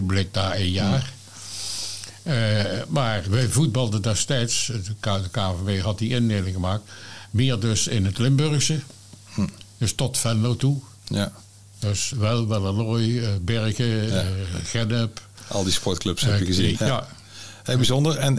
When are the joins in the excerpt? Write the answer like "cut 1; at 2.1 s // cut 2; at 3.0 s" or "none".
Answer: cut 1; at 3.2 s // cut 2; at 12.1 s // cut 3; at 16.7 s